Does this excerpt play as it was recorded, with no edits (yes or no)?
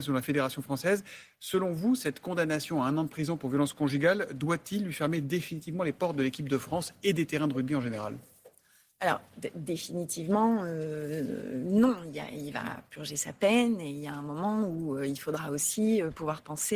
yes